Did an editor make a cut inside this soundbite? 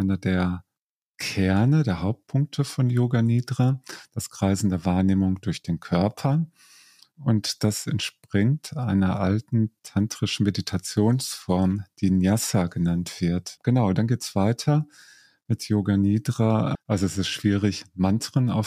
yes; 2 cuts; at 13.6 s, 16.8 s

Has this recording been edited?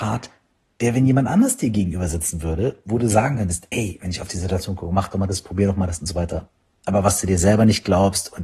no; 0 cuts

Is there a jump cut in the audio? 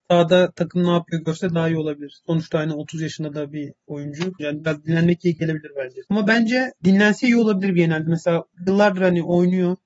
yes; 2 cuts; at 4.4 s, 6.0 s

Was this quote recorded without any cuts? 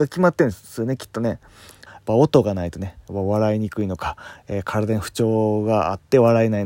no; 1 cut; at 1.9 s

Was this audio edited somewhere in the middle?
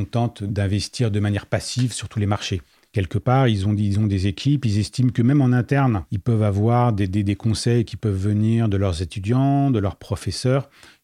no; 0 cuts

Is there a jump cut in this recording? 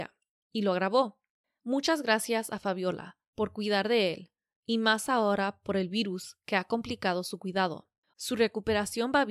yes; 1 cut; at 8.1 s

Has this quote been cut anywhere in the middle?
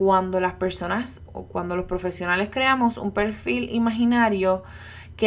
yes; 1 cut; at 1.3 s

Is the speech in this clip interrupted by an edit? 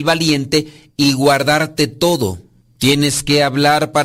no; 0 cuts

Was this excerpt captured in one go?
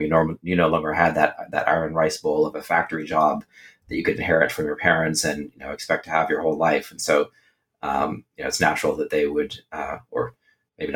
yes; 0 cuts

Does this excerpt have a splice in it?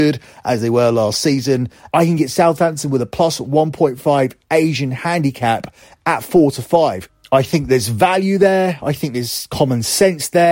yes; 1 cut; at 1.9 s

